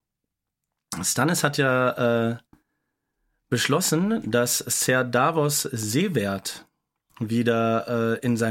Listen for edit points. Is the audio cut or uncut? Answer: uncut